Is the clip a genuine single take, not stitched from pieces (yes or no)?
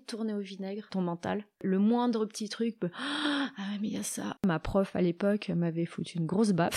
no